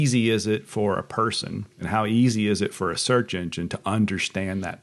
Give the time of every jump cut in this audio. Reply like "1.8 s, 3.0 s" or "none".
1.7 s